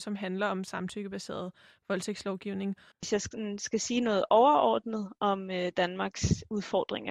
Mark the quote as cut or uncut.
cut